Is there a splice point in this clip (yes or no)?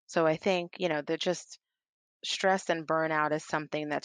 no